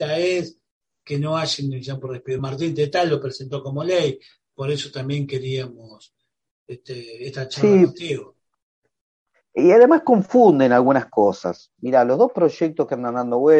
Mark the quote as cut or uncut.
uncut